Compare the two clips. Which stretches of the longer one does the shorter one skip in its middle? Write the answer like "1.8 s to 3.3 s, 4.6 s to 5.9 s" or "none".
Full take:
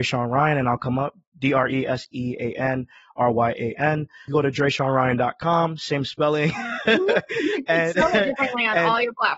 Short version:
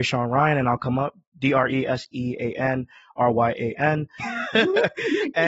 4.2 s to 6.5 s